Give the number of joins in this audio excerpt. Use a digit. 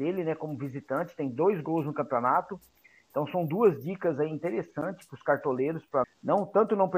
1